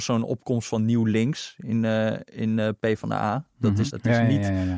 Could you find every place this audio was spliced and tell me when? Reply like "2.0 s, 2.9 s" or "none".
3.9 s

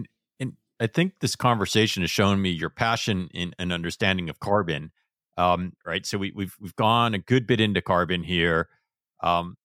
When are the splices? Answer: 5.8 s

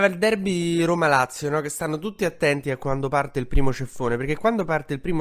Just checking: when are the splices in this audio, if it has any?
none

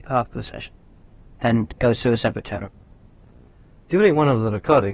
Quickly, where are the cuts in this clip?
none

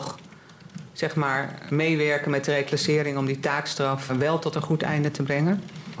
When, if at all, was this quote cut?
1.7 s, 4.1 s

